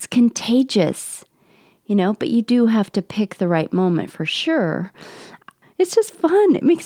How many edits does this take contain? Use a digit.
1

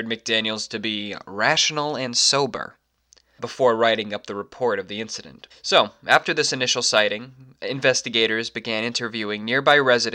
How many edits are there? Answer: 2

